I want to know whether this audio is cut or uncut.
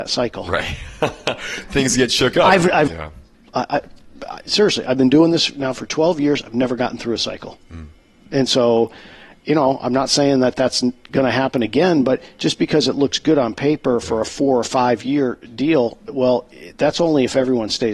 cut